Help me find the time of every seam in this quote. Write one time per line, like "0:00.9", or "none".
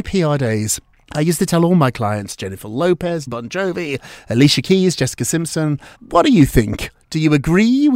0:03.3
0:05.9